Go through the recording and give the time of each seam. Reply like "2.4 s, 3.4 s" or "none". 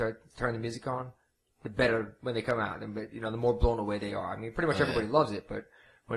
none